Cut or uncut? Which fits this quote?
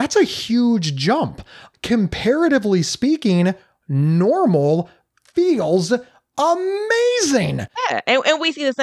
uncut